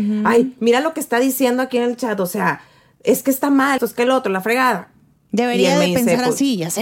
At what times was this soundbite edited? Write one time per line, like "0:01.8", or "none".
0:03.8